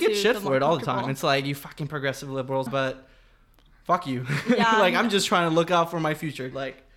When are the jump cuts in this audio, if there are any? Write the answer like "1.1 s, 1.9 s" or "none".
2.7 s